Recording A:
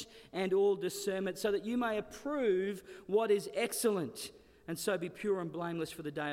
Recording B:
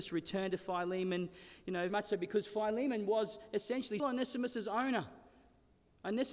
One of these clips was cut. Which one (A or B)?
B